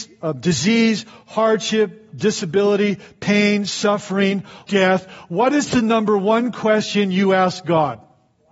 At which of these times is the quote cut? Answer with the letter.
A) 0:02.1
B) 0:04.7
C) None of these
B